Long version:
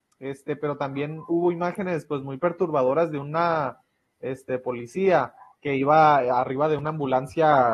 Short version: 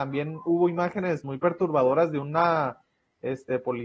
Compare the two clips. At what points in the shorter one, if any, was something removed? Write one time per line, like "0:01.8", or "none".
0:01.2